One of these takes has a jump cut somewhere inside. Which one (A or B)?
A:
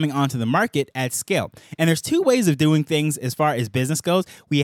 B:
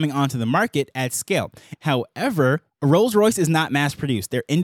B